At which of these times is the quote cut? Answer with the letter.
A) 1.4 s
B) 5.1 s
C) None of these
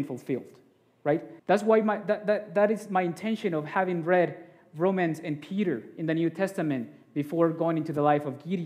A